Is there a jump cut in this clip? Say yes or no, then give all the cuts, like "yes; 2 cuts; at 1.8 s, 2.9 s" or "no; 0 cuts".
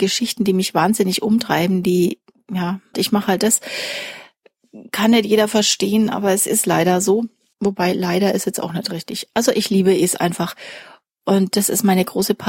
yes; 1 cut; at 2.9 s